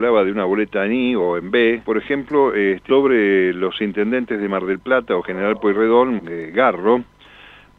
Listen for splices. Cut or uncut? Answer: cut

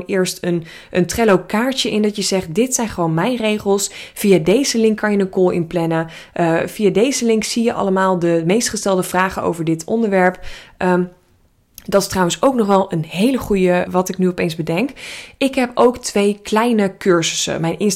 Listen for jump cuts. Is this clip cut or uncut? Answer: cut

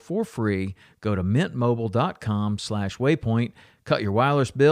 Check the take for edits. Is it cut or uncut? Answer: cut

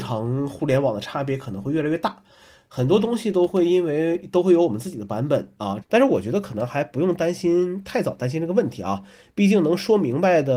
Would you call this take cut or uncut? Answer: cut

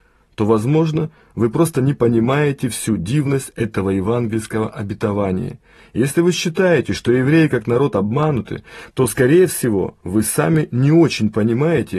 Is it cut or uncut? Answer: cut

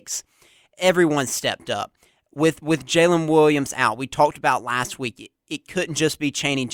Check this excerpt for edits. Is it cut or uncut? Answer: uncut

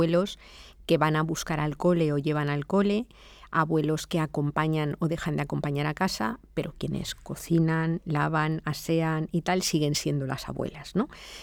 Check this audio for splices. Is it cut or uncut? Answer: uncut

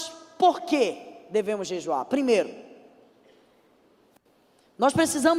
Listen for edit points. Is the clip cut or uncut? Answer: uncut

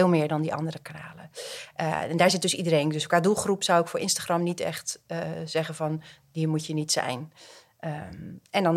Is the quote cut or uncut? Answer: uncut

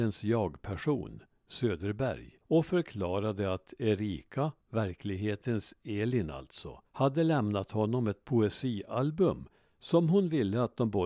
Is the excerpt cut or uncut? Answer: cut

